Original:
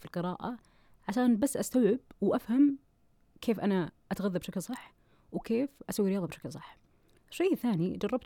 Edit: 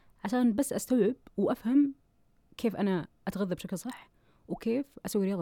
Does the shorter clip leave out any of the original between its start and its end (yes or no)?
no